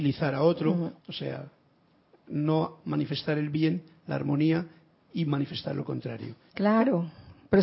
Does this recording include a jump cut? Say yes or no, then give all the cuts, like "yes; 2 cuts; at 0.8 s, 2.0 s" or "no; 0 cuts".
yes; 2 cuts; at 1.0 s, 6.5 s